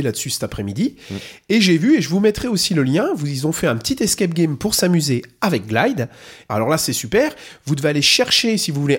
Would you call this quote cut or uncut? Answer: cut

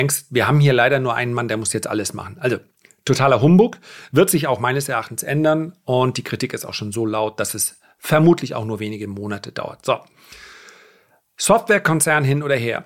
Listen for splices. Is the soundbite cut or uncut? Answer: uncut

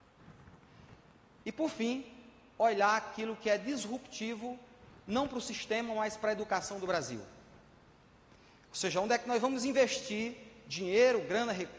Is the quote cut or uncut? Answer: cut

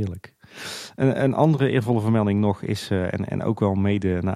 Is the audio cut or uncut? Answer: uncut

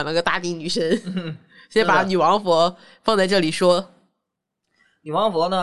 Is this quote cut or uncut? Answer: uncut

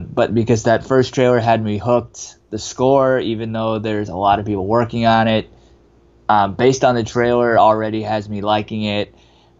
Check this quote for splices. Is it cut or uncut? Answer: uncut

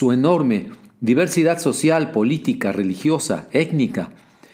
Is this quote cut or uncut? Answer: uncut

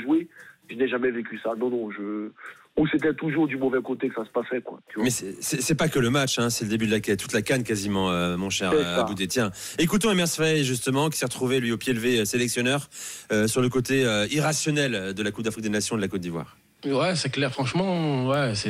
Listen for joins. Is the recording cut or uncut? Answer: uncut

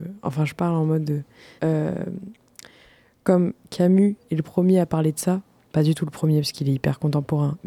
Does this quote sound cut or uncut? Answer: cut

